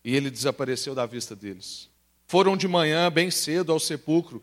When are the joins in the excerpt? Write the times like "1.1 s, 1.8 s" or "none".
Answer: 2.2 s